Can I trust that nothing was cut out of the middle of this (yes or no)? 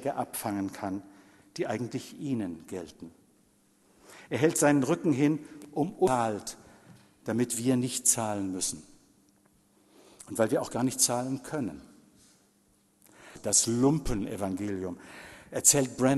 yes